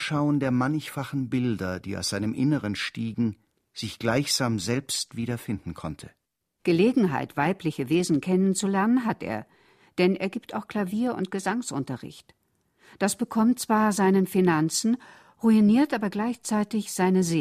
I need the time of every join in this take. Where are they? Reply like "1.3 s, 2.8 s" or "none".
6.6 s